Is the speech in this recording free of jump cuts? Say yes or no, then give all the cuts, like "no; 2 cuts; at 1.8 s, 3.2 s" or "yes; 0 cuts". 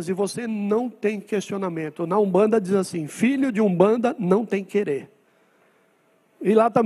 yes; 0 cuts